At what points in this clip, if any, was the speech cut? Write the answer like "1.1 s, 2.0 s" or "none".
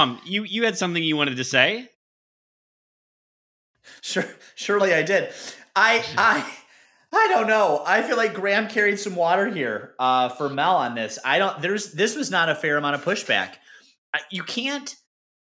none

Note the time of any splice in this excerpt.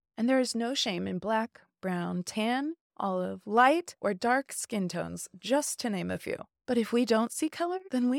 none

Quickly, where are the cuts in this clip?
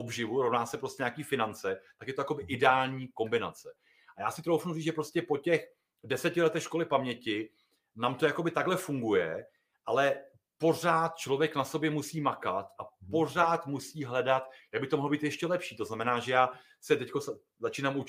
none

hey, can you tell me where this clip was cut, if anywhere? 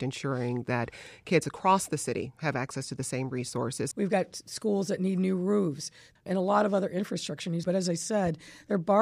3.9 s, 6.2 s, 7.6 s

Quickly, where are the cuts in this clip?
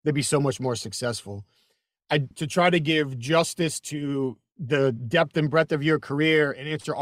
2.3 s

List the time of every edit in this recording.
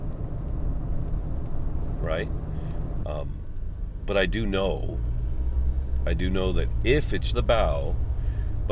3.0 s, 7.3 s

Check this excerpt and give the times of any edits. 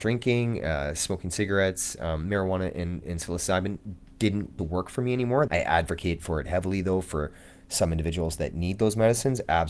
5.5 s

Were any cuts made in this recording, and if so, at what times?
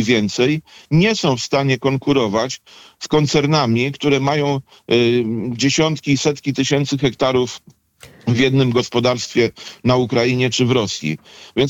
none

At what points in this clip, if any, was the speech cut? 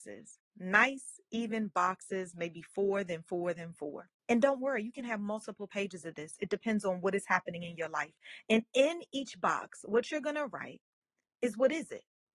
4.2 s

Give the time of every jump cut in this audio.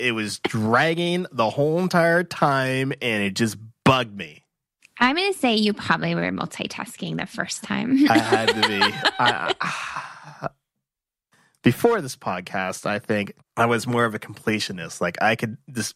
none

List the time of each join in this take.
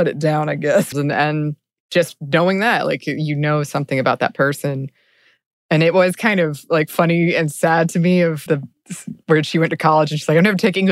0.9 s, 8.5 s

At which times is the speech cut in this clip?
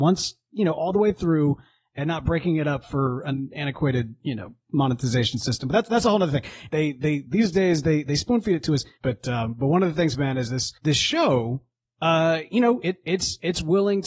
6.7 s, 9.0 s, 10.8 s

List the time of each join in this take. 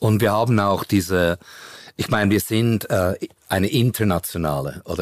none

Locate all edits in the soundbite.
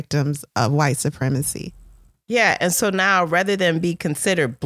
2.1 s

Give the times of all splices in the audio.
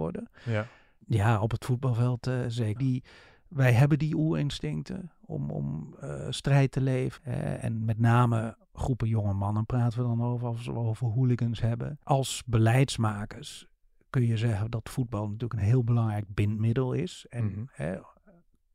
1.0 s, 2.8 s

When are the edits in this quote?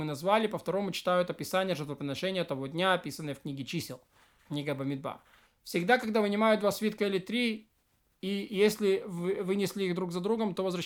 5.5 s

